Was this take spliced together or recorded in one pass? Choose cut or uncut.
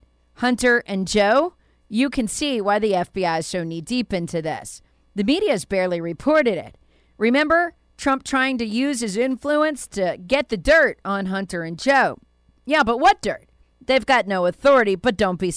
cut